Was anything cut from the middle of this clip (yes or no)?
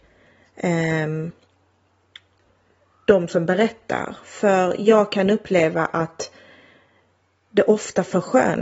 no